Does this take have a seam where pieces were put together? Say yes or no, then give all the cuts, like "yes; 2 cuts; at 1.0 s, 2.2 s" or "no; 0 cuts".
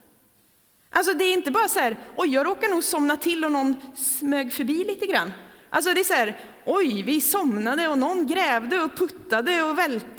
no; 0 cuts